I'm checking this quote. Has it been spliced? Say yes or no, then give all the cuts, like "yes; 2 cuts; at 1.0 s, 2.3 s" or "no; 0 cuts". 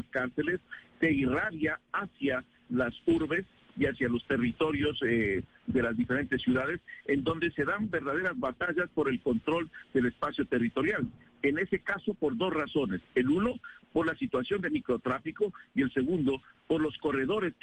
no; 0 cuts